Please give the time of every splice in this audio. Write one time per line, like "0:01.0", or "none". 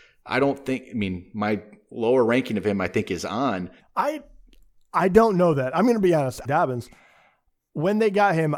0:03.8
0:06.4